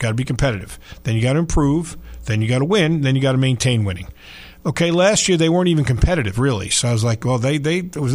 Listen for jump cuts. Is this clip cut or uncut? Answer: uncut